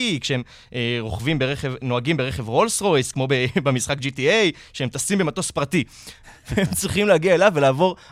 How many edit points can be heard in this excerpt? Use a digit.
1